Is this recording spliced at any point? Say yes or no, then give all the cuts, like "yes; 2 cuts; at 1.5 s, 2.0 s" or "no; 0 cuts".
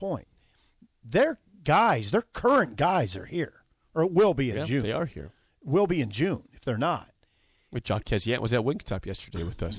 no; 0 cuts